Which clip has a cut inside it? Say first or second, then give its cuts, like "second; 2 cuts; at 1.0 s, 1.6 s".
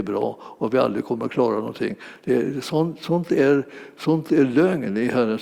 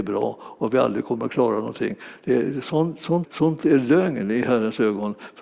second; 1 cut; at 3.2 s